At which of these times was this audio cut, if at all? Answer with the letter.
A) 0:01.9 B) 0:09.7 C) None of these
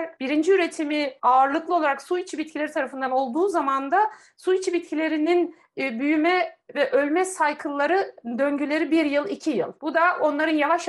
C